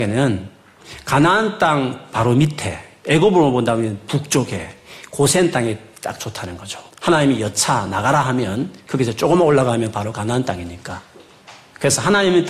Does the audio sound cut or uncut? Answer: cut